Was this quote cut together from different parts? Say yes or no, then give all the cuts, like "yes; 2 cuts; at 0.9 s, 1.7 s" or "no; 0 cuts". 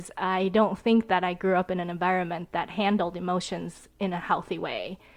no; 0 cuts